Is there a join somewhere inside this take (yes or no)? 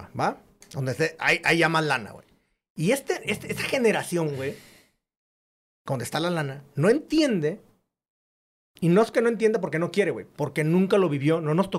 no